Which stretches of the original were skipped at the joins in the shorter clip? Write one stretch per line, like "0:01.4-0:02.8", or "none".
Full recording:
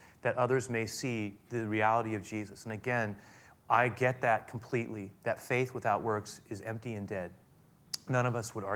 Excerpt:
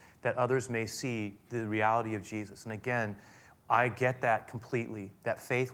none